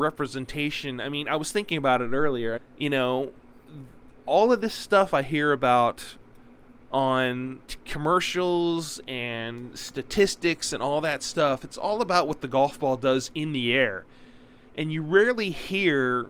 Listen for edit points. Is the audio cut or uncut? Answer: cut